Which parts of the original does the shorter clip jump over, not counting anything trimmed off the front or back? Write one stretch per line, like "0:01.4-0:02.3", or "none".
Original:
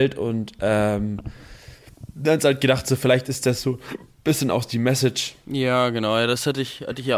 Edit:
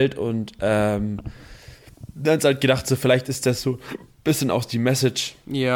none